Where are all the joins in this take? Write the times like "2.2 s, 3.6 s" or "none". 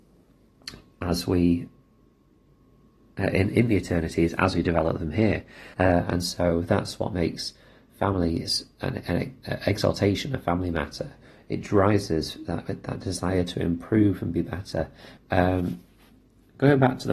5.7 s, 15.2 s